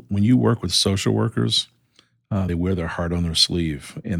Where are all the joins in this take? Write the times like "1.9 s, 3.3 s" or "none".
none